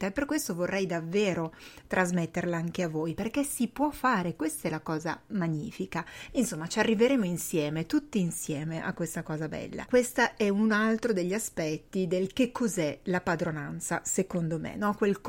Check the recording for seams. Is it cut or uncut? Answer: cut